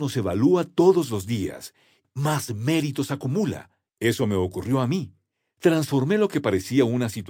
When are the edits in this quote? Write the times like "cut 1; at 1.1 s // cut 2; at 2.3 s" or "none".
cut 1; at 2.0 s // cut 2; at 3.9 s